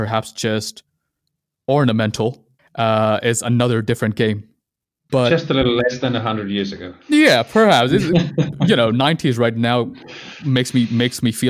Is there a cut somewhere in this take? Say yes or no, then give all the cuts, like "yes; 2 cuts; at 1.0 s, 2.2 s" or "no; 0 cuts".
yes; 2 cuts; at 2.6 s, 5.1 s